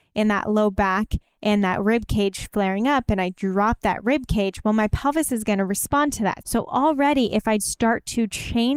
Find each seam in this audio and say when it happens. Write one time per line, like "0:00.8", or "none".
0:06.4
0:07.6